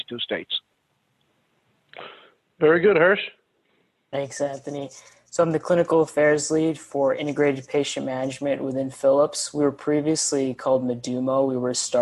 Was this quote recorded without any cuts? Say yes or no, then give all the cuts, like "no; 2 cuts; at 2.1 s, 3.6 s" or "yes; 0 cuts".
yes; 0 cuts